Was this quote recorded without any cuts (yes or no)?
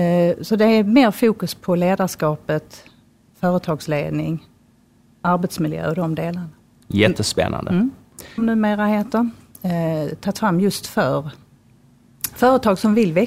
no